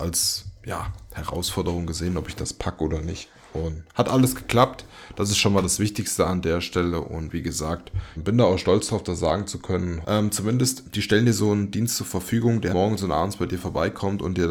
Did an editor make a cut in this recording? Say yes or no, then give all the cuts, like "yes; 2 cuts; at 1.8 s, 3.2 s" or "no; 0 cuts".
yes; 3 cuts; at 8.2 s, 10.0 s, 12.7 s